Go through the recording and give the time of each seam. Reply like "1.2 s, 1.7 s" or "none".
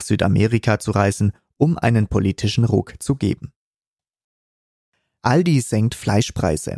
5.2 s

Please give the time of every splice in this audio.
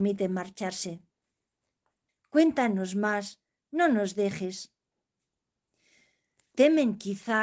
2.1 s

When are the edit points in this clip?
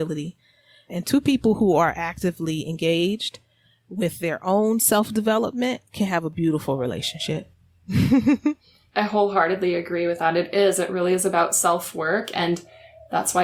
none

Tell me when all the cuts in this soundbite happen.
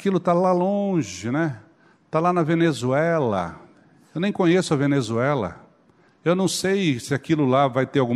6.1 s

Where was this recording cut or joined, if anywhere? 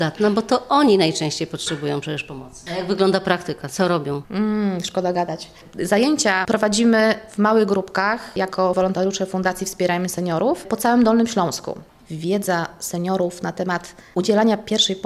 6.4 s

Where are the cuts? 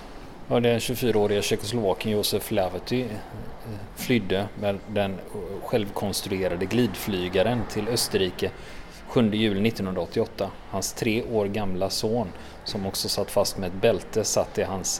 none

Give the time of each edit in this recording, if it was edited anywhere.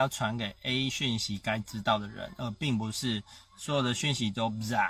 none

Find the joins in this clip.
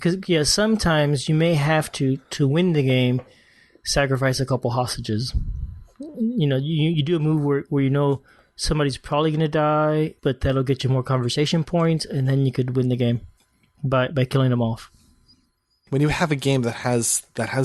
10.2 s, 15.9 s

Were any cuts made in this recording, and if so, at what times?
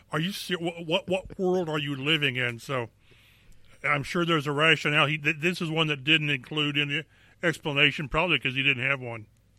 none

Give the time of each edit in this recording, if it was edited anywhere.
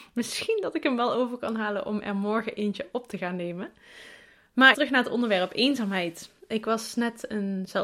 4.7 s, 6.4 s

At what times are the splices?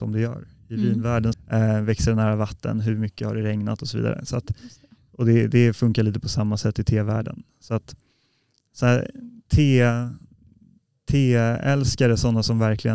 1.3 s

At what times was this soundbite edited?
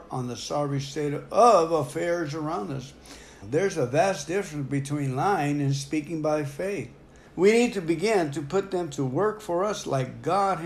3.4 s, 7.3 s

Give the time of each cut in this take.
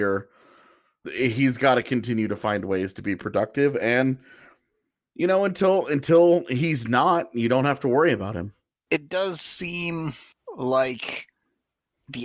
1.0 s

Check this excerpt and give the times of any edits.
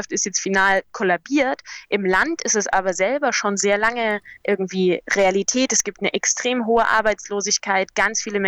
4.4 s

